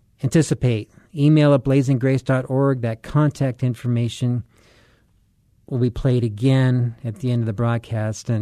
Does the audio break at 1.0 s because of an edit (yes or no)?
no